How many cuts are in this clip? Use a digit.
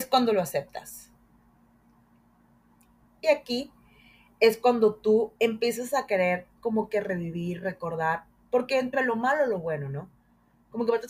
2